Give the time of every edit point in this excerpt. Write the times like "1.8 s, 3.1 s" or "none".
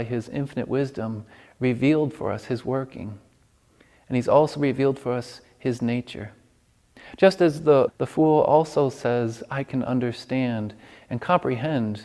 7.9 s